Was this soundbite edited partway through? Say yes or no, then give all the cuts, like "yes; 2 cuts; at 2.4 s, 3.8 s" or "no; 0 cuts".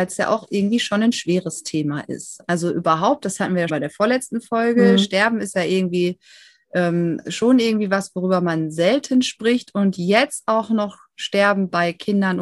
yes; 1 cut; at 3.7 s